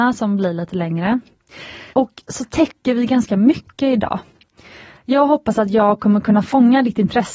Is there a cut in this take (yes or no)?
yes